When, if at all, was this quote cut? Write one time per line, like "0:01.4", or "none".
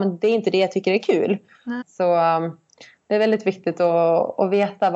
0:01.8